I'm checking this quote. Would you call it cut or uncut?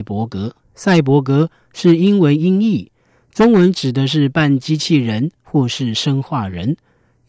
uncut